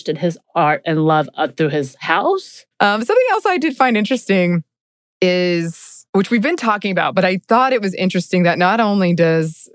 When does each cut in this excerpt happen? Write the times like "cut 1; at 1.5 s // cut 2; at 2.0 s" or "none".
cut 1; at 2.7 s // cut 2; at 6.1 s